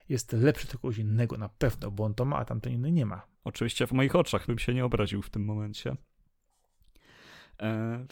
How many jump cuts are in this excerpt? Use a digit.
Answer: 2